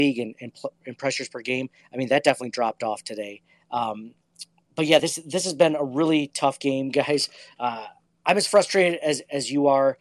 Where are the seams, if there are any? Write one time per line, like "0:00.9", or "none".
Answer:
none